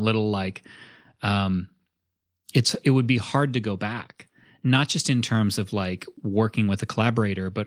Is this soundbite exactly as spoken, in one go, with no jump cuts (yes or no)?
yes